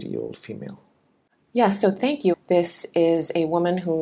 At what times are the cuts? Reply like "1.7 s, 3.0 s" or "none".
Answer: 2.3 s